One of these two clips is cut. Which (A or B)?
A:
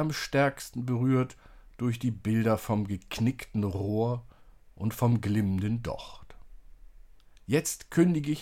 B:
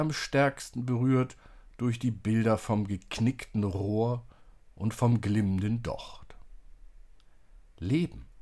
A